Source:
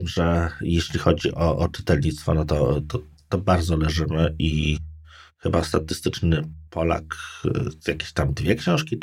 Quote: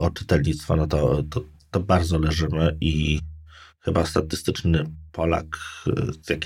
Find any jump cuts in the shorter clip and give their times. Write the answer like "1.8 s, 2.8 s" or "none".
none